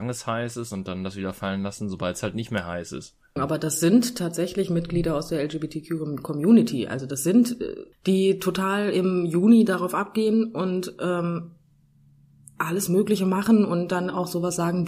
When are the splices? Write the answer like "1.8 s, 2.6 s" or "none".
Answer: 3.4 s, 7.9 s